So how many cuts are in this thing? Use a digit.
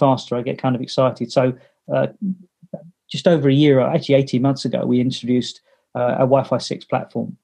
0